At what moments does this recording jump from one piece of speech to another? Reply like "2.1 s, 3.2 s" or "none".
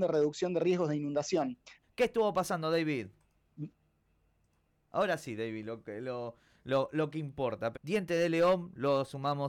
1.8 s, 4.9 s, 7.7 s